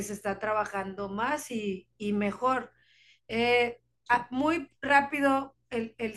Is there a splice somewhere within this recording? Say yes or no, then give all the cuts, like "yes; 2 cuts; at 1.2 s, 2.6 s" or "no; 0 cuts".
no; 0 cuts